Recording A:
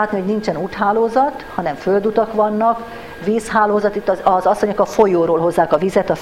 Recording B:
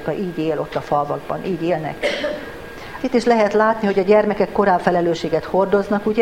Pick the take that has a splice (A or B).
B